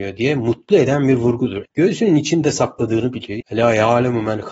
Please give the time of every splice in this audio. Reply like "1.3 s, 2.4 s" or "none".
1.7 s, 3.4 s